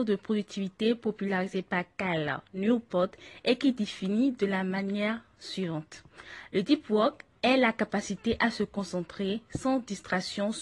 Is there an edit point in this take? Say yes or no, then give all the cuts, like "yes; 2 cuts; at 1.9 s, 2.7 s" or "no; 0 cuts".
yes; 1 cut; at 7.4 s